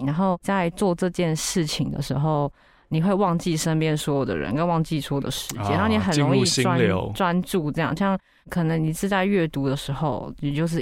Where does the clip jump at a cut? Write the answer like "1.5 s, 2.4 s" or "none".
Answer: 8.0 s